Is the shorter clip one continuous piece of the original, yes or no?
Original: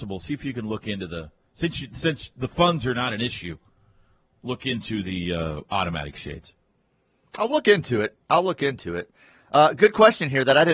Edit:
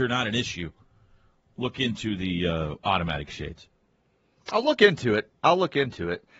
yes